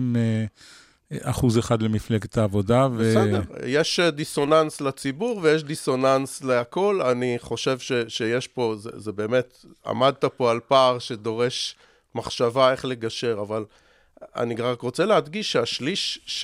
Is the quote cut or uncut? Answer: uncut